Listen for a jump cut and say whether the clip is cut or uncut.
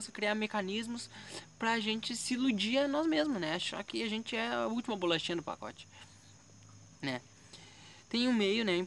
uncut